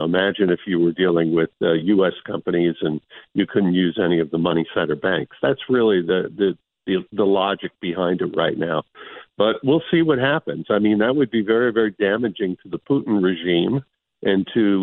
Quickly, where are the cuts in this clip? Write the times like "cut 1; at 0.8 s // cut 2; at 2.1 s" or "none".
none